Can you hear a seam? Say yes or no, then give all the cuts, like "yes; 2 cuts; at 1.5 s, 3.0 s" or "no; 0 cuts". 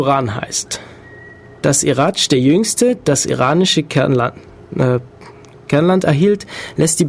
no; 0 cuts